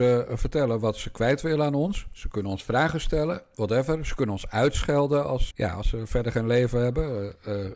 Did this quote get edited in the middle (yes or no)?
yes